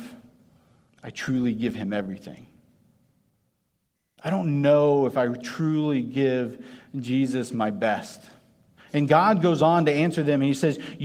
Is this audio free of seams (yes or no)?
no